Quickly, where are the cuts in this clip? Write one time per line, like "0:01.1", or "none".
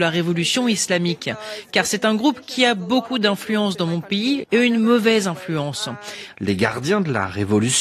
0:04.4
0:06.3